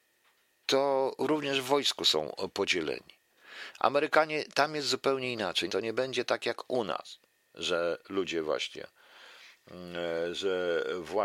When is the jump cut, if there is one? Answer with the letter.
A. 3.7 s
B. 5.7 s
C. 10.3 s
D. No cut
B